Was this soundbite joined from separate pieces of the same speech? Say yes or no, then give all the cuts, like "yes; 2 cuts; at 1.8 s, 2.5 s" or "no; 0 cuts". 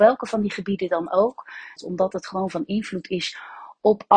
yes; 1 cut; at 1.8 s